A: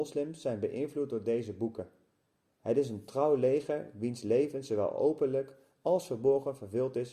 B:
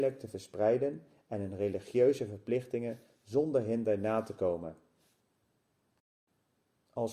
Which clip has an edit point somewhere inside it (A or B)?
A